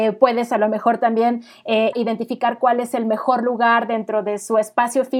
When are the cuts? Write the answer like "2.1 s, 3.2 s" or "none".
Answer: 1.9 s